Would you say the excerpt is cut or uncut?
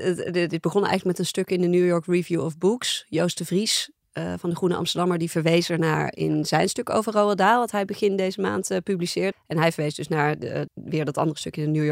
cut